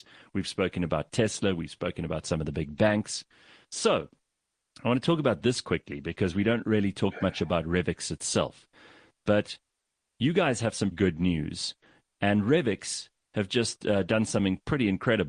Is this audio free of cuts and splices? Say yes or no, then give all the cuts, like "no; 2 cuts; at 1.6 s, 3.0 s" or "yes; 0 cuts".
no; 1 cut; at 10.9 s